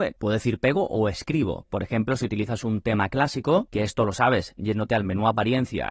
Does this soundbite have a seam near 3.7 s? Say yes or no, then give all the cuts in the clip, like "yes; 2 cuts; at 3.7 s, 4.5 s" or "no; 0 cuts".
no; 1 cut; at 1.6 s